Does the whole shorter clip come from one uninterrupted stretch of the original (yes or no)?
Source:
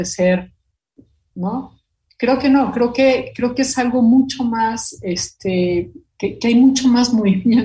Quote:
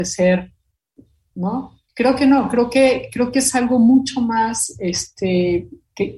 no